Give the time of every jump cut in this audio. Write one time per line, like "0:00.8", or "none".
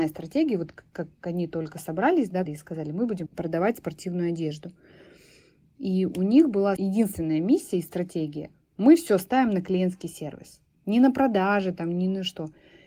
0:02.5